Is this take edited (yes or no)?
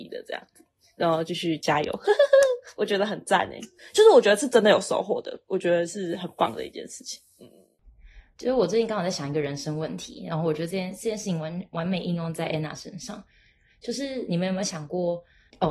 no